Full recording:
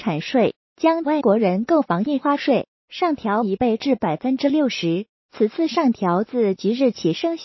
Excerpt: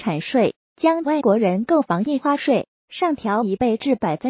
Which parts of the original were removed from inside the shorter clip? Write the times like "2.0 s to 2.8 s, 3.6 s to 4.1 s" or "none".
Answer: none